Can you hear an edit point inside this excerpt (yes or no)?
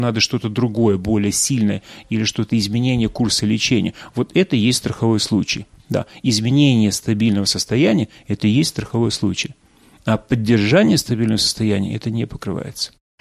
no